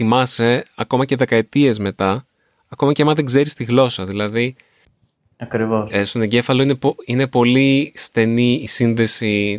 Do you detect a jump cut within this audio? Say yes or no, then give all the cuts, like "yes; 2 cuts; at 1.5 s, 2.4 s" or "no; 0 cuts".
no; 0 cuts